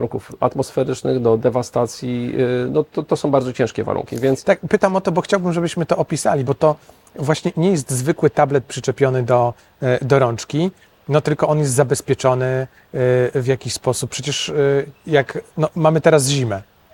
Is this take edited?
no; 0 cuts

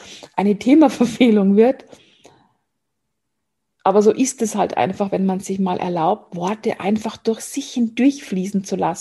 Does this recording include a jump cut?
no; 0 cuts

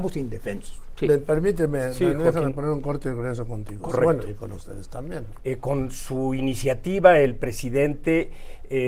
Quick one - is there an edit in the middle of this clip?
yes; 1 cut; at 5.4 s

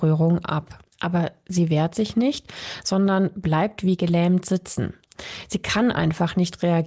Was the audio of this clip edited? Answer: yes; 1 cut; at 0.9 s

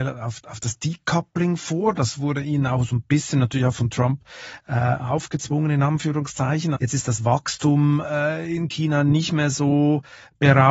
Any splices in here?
yes; 1 cut; at 6.8 s

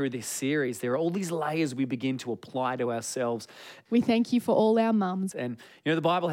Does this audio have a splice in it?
yes; 2 cuts; at 3.9 s, 5.3 s

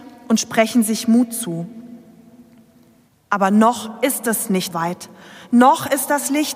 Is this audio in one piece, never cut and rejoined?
no; 2 cuts; at 3.1 s, 4.7 s

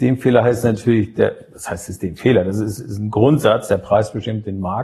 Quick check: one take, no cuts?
yes; 0 cuts

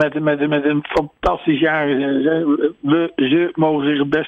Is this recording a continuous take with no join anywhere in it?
yes; 0 cuts

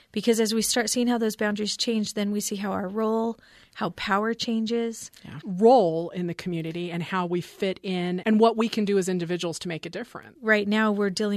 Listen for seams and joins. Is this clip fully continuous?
no; 3 cuts; at 5.4 s, 8.2 s, 10.4 s

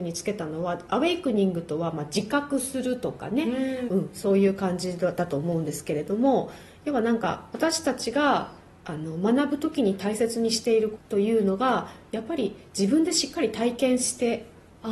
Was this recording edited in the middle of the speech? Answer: yes; 2 cuts; at 3.9 s, 11.0 s

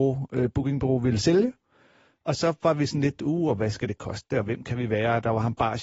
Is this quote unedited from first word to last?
yes; 0 cuts

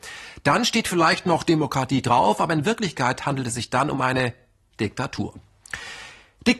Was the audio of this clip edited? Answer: no; 0 cuts

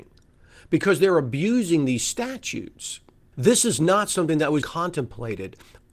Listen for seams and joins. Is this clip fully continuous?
no; 2 cuts; at 3.3 s, 4.6 s

